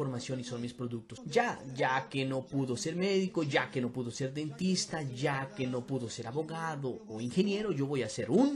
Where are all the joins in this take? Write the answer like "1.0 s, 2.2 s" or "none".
1.2 s